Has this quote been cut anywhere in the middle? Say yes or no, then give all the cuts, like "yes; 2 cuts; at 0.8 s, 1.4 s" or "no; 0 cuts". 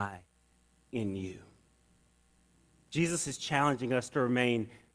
no; 0 cuts